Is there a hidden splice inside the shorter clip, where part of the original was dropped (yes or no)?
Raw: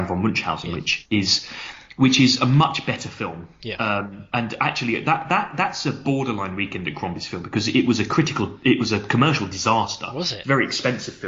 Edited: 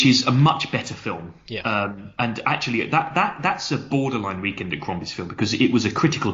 no